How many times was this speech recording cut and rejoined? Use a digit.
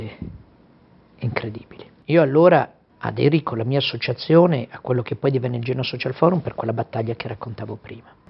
0